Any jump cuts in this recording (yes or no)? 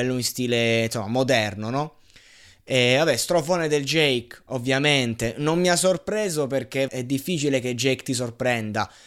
yes